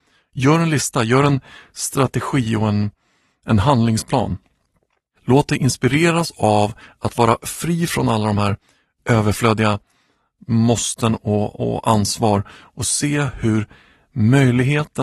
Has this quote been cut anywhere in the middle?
no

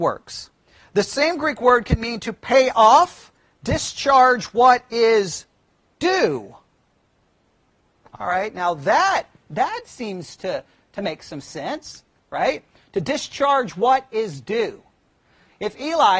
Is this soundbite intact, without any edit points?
yes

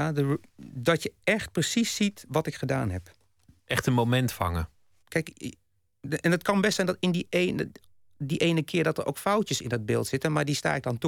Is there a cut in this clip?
yes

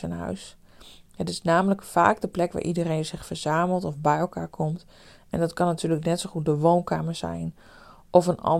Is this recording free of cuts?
yes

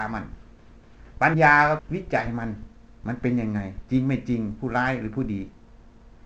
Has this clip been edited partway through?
yes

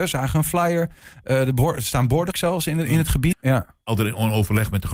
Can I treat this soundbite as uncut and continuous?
no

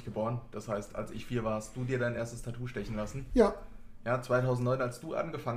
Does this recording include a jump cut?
no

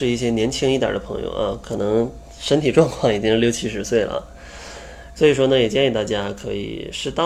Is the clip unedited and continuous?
no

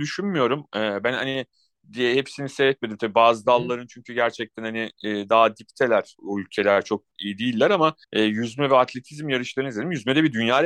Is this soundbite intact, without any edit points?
no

